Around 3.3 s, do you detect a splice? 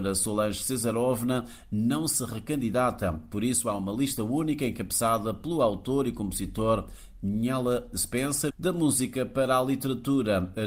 no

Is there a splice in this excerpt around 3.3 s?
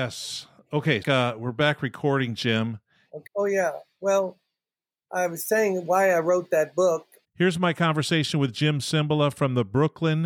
yes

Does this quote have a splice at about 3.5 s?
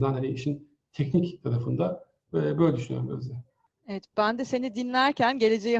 no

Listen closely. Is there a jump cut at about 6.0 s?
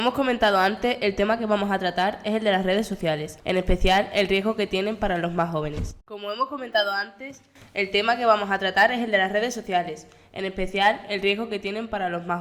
yes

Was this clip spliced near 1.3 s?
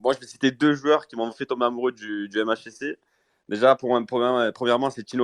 yes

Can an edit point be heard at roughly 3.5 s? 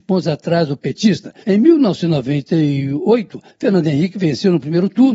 yes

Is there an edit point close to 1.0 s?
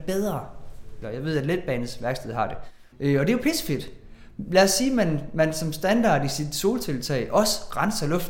yes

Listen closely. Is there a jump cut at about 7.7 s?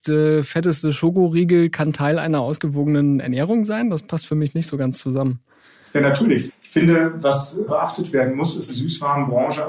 yes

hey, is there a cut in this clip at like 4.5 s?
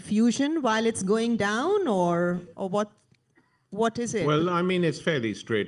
no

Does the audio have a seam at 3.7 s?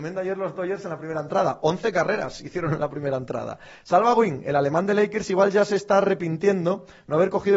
no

